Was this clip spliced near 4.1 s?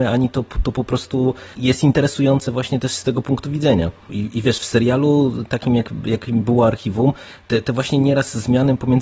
yes; 1 cut; at 4.1 s

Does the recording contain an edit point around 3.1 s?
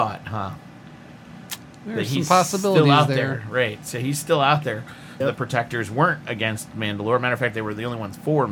no; 1 cut; at 5.2 s

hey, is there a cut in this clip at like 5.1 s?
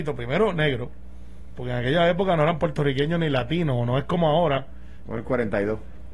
yes; 1 cut; at 5.1 s

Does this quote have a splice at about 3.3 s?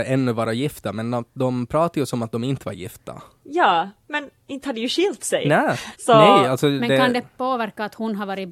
no; 1 cut; at 5.9 s

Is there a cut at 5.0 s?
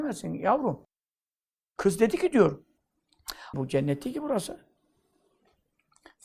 no; 1 cut; at 3.5 s

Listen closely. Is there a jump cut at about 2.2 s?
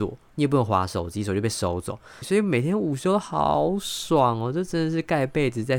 yes; 1 cut; at 2.2 s

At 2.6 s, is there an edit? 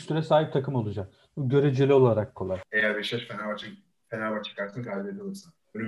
yes; 1 cut; at 2.6 s

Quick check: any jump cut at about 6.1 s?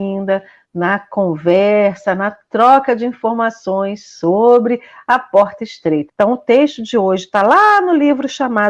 yes; 1 cut; at 6.1 s

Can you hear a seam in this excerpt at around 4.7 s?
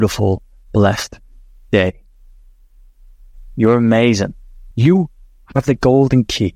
yes; 1 cut; at 4.7 s

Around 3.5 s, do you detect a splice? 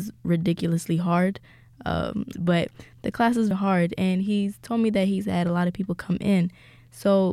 yes; 2 cuts; at 2.3 s, 3.5 s

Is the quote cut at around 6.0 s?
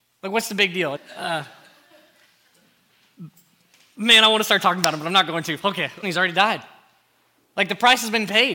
yes; 2 cuts; at 1.0 s, 6.0 s

